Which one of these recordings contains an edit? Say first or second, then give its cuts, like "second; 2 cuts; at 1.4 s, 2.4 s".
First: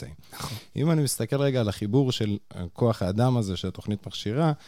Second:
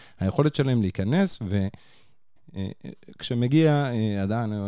second; 1 cut; at 2.4 s